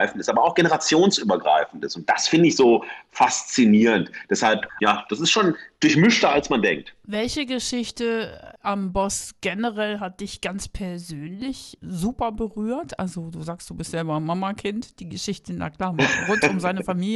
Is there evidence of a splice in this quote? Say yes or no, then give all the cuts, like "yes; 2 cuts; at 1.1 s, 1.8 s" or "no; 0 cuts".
no; 0 cuts